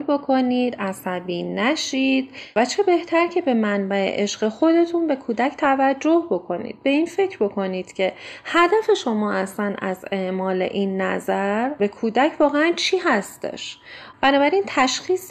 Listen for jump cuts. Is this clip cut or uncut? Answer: cut